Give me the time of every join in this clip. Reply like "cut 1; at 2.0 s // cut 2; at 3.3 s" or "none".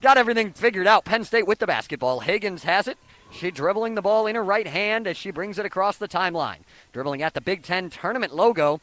none